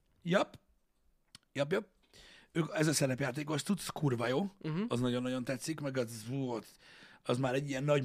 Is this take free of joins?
yes; 0 cuts

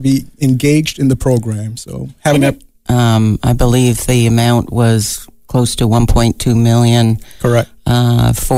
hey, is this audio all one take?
no; 1 cut; at 2.9 s

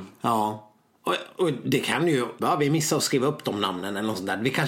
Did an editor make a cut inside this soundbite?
yes; 1 cut; at 2.4 s

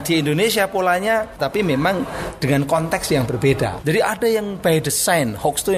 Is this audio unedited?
no; 2 cuts; at 1.4 s, 3.8 s

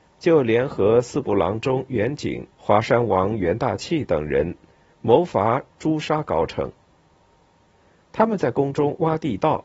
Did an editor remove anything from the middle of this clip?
yes; 1 cut; at 2.5 s

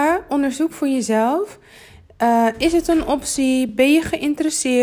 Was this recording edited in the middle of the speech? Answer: no; 0 cuts

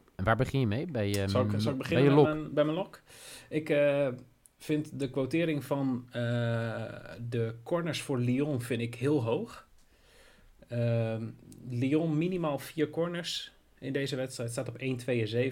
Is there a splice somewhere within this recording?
no; 0 cuts

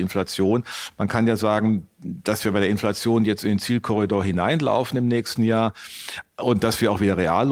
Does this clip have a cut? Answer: no; 0 cuts

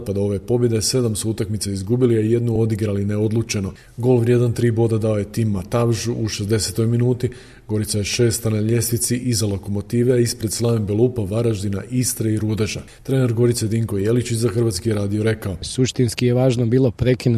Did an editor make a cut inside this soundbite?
no; 0 cuts

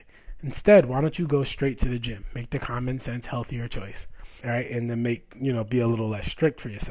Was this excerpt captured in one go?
no; 1 cut; at 4.4 s

